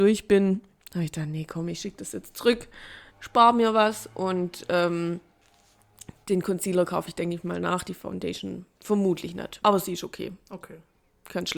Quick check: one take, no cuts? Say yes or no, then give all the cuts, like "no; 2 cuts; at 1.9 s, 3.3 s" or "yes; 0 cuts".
no; 2 cuts; at 3.1 s, 9.6 s